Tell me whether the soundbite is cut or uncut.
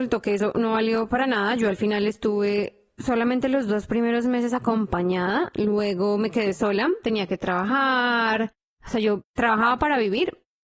cut